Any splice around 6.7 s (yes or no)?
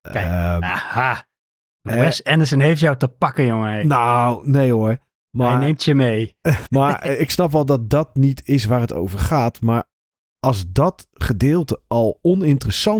yes